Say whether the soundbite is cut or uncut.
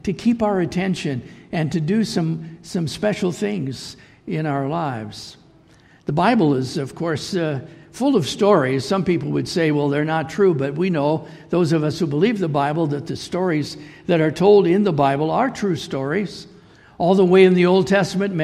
uncut